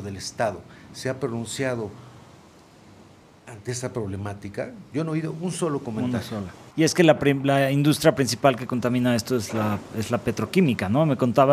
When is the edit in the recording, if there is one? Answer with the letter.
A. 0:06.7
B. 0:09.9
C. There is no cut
A